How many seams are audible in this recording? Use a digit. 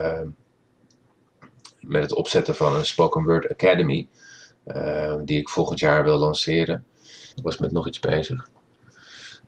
2